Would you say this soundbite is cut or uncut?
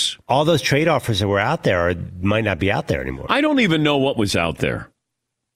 uncut